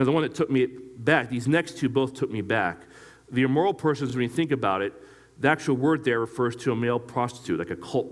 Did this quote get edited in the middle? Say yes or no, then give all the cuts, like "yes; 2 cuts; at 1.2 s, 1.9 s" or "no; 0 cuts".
no; 0 cuts